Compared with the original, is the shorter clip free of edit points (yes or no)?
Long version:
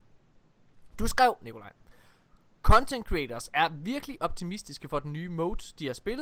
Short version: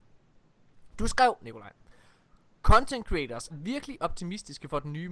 no